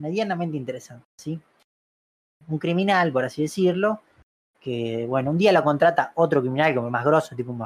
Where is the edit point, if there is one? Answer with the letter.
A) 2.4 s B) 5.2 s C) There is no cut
A